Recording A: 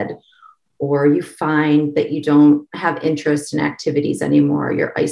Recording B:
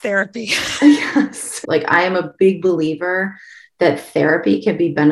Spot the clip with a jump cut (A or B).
B